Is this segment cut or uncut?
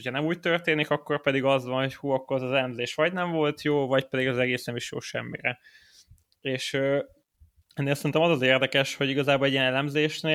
uncut